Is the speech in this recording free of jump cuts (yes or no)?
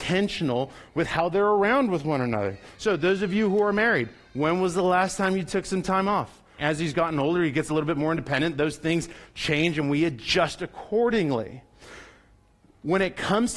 no